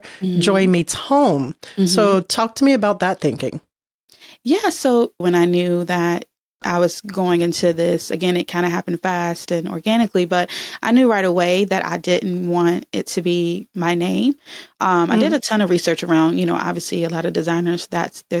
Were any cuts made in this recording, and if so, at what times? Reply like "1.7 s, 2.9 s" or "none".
5.2 s

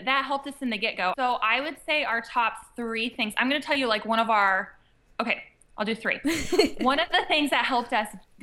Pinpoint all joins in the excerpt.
1.1 s

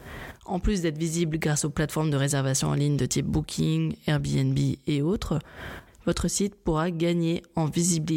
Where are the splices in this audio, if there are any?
5.9 s

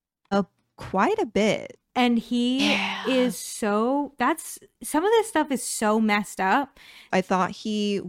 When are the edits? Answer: 1.8 s, 7.1 s

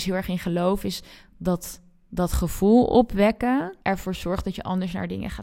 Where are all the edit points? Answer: 3.8 s

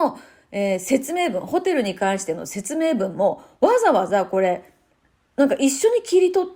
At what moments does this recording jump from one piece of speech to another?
none

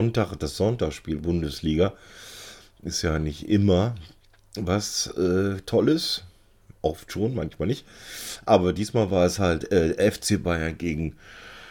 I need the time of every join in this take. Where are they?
none

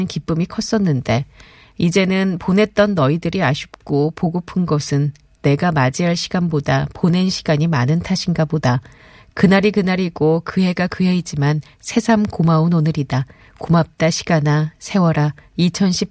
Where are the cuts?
none

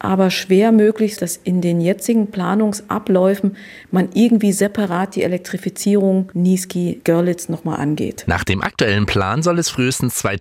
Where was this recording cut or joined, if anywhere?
1.2 s

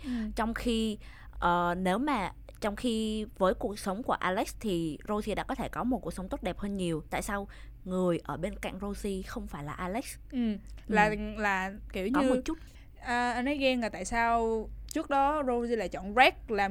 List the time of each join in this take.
1.3 s

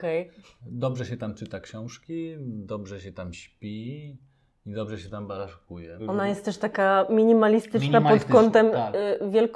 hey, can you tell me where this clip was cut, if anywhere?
6.0 s

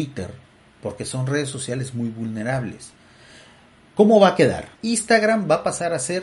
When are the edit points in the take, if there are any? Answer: 4.7 s

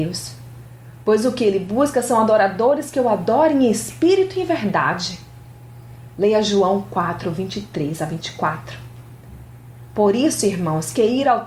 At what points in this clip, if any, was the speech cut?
none

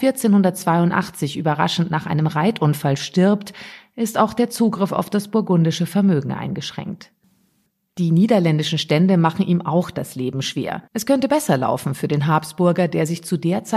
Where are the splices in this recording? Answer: 10.9 s

